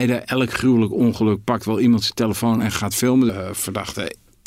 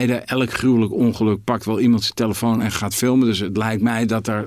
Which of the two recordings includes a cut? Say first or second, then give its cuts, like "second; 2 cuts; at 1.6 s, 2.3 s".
first; 1 cut; at 3.3 s